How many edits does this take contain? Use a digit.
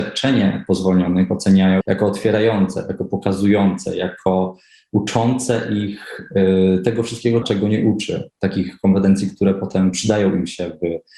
2